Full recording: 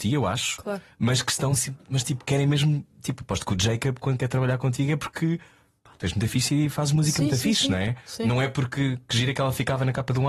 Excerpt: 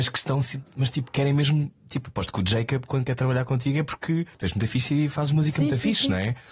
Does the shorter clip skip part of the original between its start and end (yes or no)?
yes